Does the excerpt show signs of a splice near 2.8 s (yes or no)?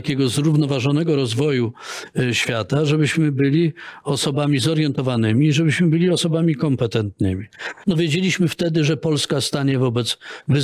no